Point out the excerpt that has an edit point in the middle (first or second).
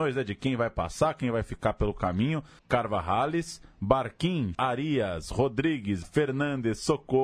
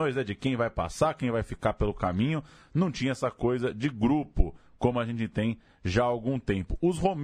first